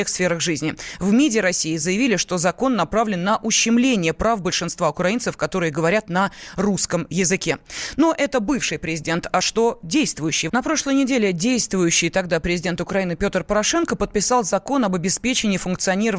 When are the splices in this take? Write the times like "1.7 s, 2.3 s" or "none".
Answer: 10.5 s